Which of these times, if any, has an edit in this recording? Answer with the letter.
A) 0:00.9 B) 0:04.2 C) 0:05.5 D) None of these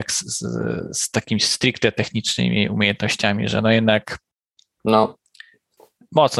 D